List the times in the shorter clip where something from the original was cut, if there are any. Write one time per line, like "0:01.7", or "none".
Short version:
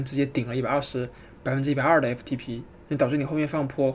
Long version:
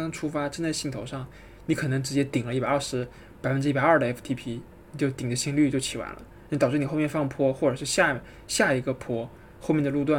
0:02.9